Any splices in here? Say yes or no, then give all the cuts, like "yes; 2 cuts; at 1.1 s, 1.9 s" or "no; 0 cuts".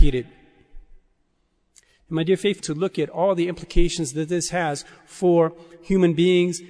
yes; 1 cut; at 2.6 s